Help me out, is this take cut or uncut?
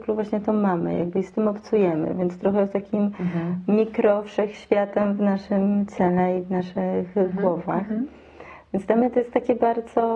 uncut